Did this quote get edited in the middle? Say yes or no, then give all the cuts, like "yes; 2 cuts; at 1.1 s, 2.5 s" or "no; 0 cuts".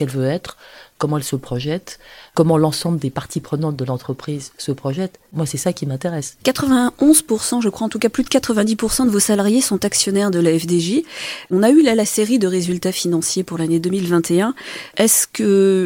yes; 1 cut; at 14.9 s